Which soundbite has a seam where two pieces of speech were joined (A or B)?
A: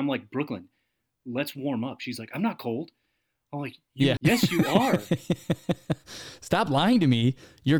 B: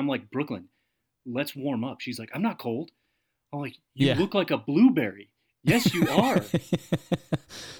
A